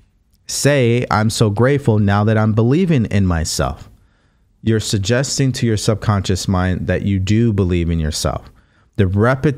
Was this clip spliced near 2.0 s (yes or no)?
no